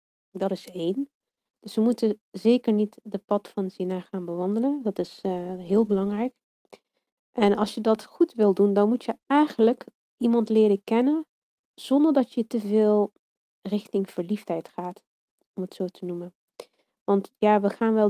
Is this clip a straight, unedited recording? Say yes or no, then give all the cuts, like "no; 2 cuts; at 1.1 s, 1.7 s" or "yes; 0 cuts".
no; 1 cut; at 11.6 s